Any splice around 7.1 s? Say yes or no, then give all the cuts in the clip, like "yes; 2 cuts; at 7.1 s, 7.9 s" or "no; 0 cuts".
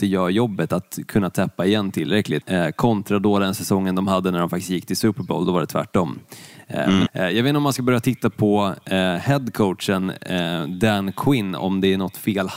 yes; 2 cuts; at 2.4 s, 7.1 s